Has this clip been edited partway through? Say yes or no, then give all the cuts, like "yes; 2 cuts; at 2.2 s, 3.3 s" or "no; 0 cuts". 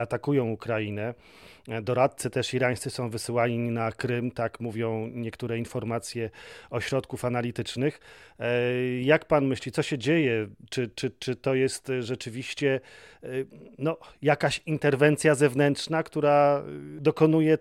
no; 0 cuts